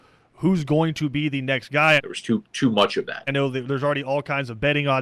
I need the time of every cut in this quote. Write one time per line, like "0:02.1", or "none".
0:02.0
0:03.3